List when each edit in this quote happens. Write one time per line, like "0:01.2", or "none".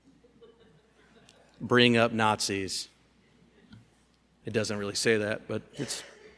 none

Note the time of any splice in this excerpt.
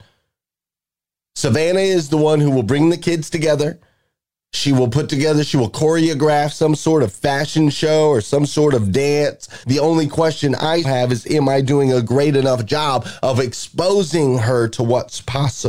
0:09.6
0:10.8

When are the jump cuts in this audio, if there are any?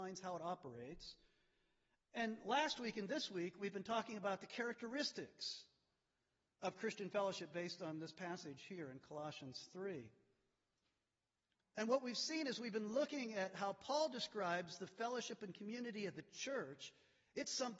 none

